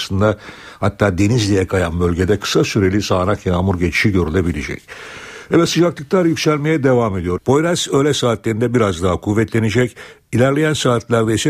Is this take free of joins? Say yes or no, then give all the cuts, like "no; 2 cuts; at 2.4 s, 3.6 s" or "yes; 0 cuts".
no; 1 cut; at 7.4 s